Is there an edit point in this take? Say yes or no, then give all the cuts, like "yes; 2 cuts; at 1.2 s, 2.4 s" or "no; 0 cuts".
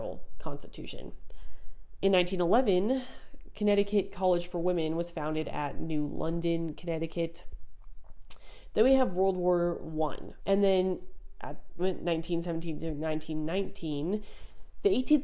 yes; 2 cuts; at 10.4 s, 11.8 s